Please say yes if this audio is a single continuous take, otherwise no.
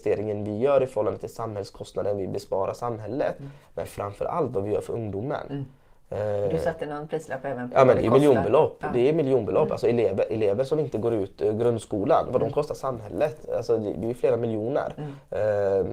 yes